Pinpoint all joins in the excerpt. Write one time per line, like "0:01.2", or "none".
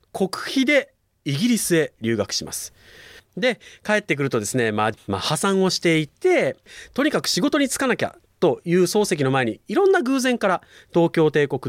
0:03.2
0:05.0